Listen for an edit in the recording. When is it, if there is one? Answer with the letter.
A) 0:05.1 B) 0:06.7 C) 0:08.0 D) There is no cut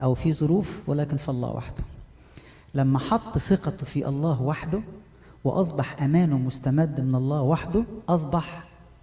C